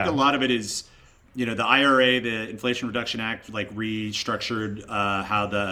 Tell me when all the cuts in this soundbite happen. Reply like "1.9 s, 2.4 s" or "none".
none